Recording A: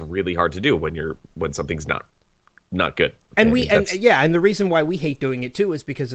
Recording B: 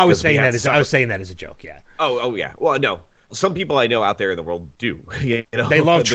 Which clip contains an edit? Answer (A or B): B